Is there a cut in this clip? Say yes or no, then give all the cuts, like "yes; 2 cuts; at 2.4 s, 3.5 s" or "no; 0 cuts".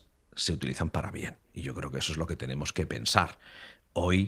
no; 0 cuts